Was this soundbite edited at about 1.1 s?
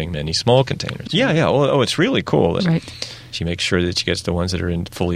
yes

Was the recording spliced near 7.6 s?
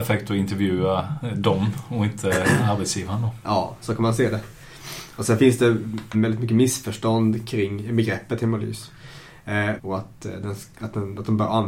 no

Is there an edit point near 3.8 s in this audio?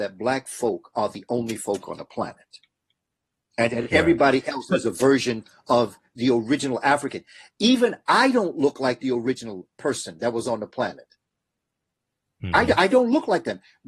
no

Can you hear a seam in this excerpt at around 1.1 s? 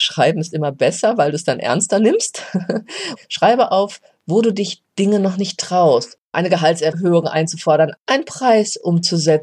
no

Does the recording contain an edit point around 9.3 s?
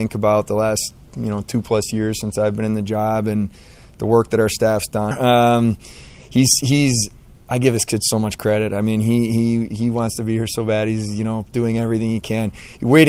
no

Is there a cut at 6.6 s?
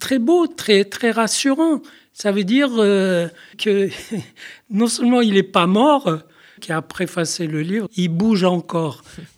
yes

